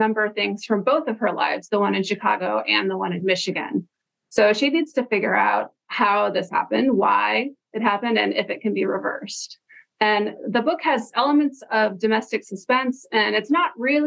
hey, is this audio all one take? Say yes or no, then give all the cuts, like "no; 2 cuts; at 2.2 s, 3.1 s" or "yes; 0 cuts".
yes; 0 cuts